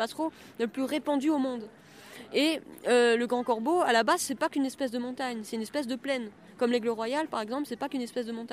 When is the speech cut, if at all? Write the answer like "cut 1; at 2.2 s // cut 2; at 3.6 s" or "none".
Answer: none

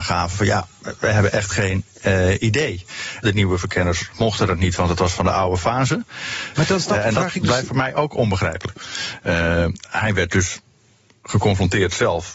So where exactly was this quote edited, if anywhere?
cut 1; at 3.2 s // cut 2; at 6.5 s // cut 3; at 8.7 s

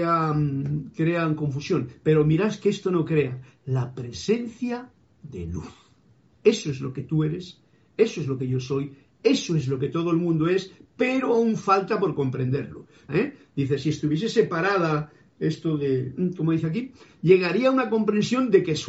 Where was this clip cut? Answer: cut 1; at 13.1 s

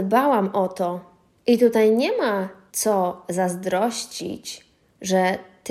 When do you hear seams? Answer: none

